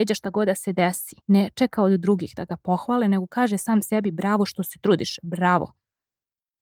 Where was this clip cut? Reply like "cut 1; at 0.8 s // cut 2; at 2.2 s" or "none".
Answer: cut 1; at 1.2 s